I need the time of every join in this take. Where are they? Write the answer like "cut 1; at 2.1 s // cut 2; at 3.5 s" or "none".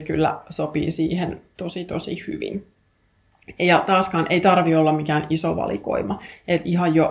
none